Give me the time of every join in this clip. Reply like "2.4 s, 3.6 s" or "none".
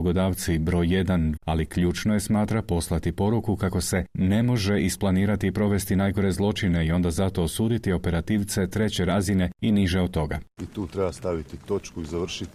1.4 s, 10.6 s